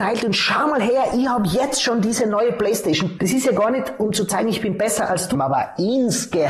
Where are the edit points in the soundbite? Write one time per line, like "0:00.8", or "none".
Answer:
0:03.2
0:05.3